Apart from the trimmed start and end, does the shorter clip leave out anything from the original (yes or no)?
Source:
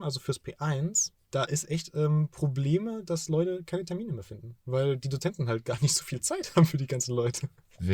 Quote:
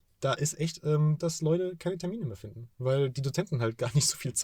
yes